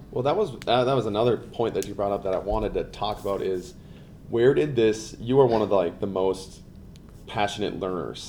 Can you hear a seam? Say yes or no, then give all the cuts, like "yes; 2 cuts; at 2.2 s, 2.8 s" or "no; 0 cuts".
no; 0 cuts